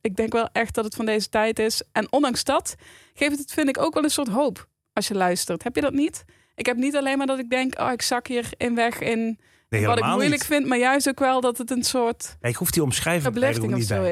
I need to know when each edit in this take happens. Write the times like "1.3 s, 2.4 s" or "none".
none